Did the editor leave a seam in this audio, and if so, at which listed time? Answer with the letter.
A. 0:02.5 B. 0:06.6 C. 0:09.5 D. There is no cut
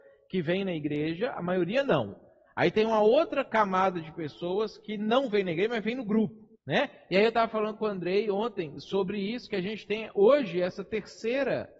B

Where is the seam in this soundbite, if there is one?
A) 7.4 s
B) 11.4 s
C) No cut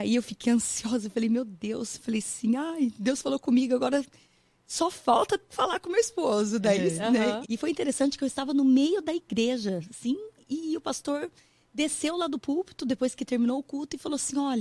A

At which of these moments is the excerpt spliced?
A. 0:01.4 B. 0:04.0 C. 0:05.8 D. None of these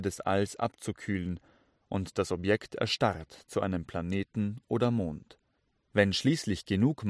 C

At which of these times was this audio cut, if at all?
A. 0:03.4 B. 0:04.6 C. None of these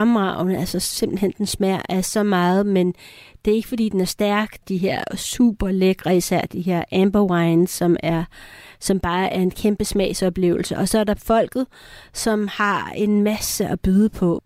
B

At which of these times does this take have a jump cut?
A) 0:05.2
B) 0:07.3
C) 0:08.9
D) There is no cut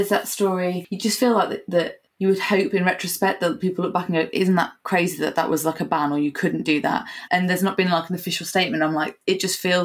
B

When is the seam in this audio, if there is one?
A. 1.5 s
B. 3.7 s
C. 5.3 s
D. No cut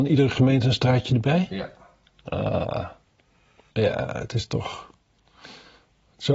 B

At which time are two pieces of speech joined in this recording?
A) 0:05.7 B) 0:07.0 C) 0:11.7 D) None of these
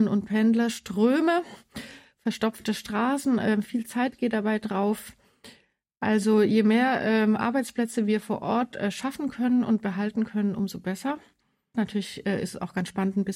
C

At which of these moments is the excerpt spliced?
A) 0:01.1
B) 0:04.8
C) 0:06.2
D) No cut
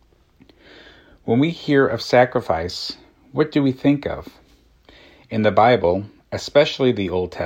D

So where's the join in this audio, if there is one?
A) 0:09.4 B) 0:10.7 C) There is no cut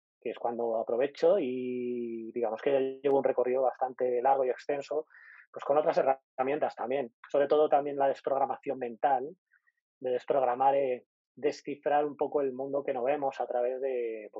C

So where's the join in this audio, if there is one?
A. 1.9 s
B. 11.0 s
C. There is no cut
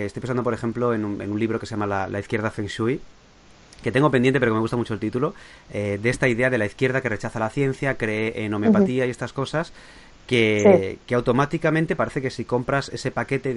C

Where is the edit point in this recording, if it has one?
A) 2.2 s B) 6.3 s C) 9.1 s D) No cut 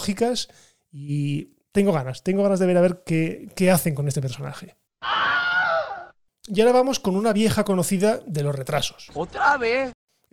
D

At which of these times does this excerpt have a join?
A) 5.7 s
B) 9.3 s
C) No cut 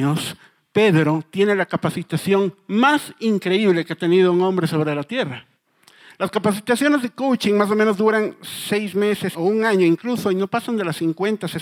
B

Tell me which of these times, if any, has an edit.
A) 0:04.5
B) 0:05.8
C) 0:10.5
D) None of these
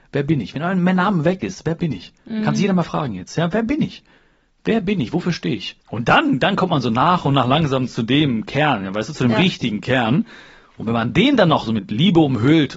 B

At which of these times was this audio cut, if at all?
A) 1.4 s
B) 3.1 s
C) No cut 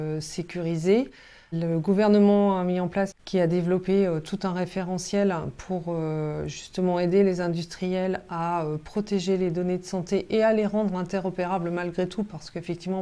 B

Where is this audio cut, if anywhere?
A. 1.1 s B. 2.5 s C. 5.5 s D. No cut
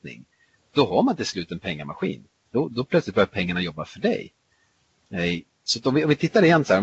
B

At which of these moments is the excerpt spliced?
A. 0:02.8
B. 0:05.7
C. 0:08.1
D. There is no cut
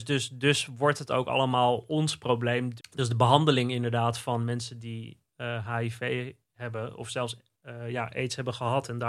A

